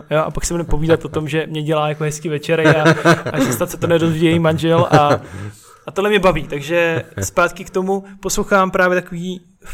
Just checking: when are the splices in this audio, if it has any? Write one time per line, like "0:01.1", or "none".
none